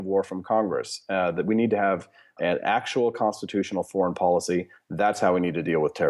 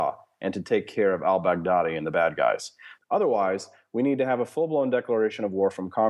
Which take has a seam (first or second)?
second